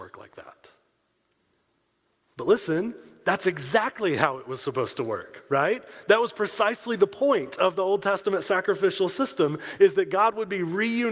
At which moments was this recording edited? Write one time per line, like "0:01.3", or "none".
none